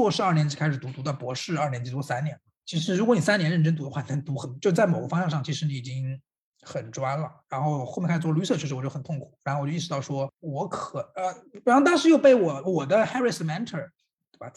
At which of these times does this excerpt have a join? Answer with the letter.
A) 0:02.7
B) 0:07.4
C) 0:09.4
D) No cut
D